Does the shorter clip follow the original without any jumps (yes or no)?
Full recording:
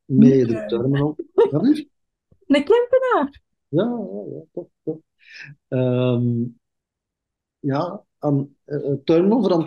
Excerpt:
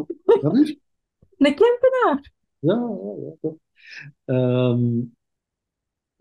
no